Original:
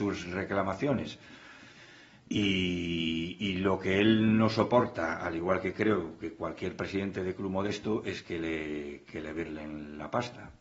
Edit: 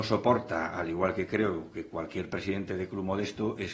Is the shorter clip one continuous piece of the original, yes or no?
yes